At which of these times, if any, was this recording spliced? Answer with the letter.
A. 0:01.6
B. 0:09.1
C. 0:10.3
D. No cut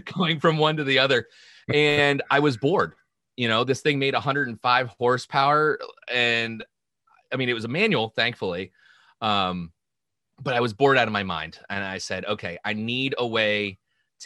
D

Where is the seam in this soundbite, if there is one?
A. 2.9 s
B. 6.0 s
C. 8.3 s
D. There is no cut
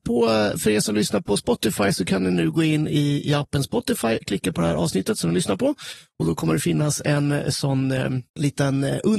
C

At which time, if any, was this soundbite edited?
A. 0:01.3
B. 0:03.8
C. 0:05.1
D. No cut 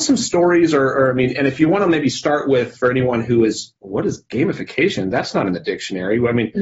B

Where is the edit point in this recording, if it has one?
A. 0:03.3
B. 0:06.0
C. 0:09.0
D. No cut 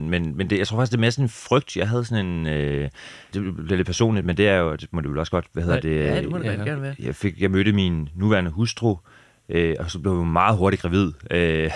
A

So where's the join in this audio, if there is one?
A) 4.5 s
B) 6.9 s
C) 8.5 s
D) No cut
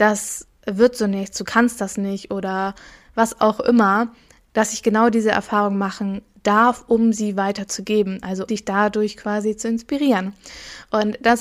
C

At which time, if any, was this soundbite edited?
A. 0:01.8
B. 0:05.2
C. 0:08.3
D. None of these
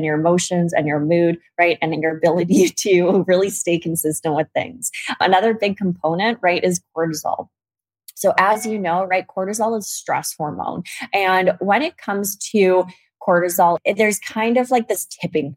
D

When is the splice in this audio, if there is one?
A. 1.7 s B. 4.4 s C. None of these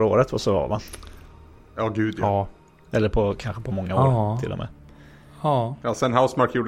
C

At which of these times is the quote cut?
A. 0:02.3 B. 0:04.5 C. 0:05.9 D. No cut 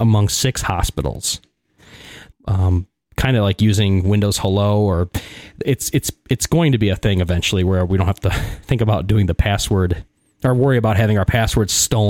A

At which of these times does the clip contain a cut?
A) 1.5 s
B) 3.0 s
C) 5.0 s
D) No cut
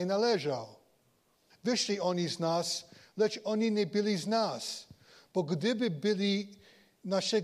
A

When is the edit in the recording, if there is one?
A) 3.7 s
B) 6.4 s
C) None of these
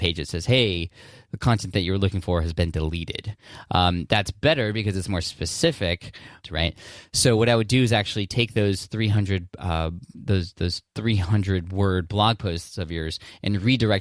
B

